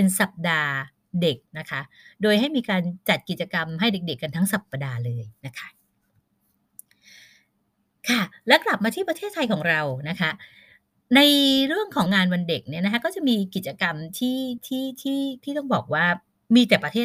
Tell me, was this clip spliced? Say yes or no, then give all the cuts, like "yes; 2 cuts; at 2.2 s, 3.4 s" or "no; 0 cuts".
yes; 2 cuts; at 1.5 s, 12.1 s